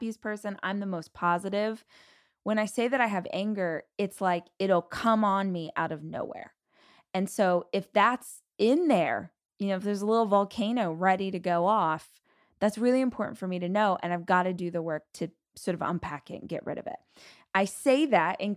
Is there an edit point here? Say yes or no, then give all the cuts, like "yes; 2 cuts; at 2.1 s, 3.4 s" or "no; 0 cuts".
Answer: no; 0 cuts